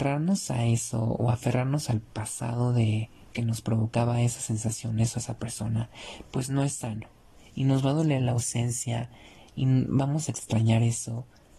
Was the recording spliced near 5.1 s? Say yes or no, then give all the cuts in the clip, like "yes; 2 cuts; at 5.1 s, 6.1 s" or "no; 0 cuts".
no; 1 cut; at 7.4 s